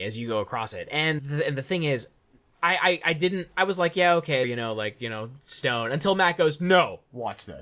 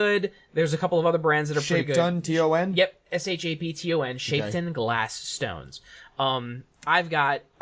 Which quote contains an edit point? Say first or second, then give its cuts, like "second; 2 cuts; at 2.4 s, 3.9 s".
first; 2 cuts; at 1.2 s, 4.4 s